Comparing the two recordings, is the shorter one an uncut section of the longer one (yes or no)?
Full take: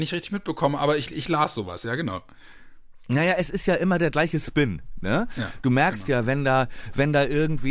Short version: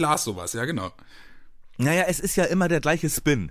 yes